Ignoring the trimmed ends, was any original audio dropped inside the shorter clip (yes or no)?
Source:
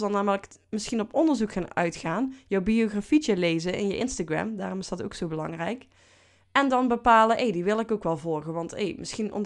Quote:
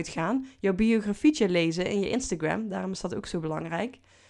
no